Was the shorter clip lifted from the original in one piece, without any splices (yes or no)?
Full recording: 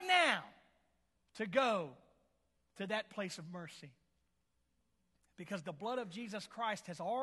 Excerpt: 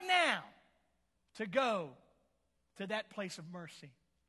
yes